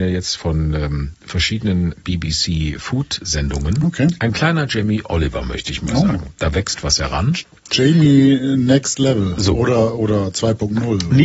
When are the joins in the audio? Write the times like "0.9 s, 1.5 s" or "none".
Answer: none